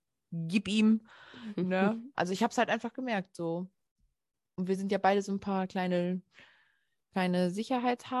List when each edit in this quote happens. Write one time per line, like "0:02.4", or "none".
0:02.1